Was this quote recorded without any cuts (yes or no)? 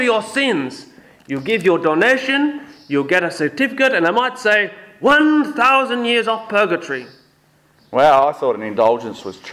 yes